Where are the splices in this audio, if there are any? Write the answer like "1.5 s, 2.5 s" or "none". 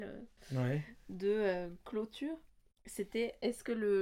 none